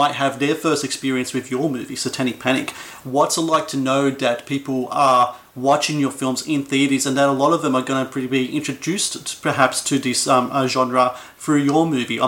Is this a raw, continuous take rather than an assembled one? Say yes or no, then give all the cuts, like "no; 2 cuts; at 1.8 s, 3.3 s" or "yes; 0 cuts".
yes; 0 cuts